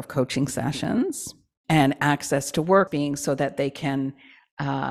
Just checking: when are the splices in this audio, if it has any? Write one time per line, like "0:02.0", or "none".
0:01.6
0:02.9